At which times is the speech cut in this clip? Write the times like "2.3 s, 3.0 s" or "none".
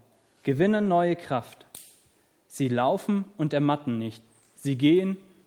2.4 s